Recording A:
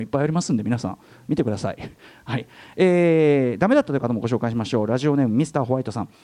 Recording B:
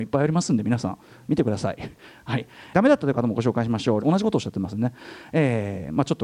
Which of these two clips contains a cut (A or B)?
B